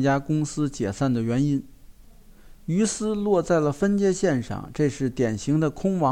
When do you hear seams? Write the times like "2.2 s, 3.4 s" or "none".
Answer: none